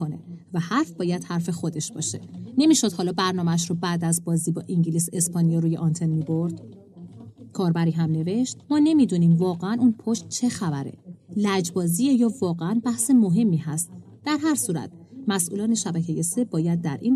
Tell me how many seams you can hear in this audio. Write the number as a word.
one